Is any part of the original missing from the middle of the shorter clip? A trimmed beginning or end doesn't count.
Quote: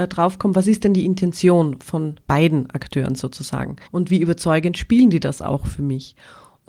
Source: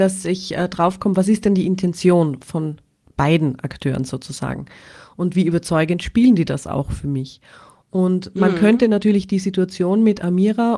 yes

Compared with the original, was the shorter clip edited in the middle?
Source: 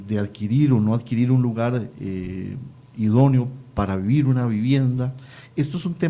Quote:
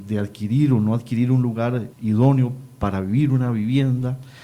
yes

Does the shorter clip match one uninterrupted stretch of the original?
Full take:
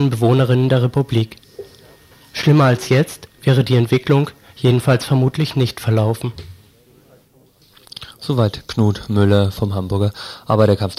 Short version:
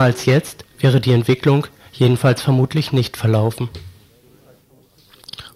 yes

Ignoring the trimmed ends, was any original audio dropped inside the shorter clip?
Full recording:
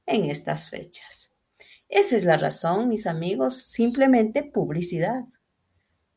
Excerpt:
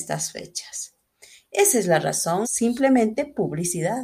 yes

